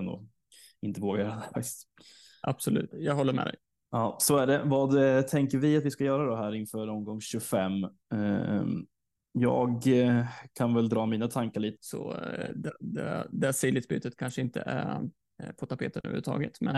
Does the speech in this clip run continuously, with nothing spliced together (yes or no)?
no